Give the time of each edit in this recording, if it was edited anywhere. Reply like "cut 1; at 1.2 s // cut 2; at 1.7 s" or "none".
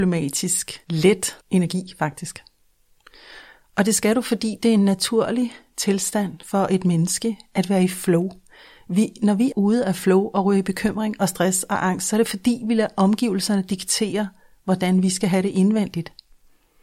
cut 1; at 1.4 s // cut 2; at 9.5 s